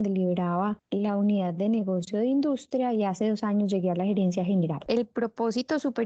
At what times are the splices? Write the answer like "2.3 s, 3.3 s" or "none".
4.9 s